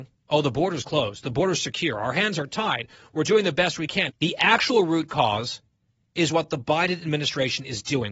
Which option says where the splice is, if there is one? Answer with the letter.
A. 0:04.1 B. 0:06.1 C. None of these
A